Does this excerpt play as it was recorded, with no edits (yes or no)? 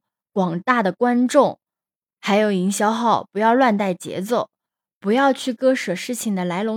yes